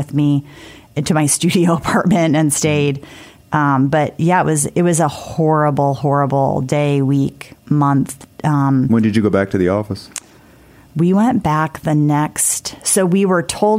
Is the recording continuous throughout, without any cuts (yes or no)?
yes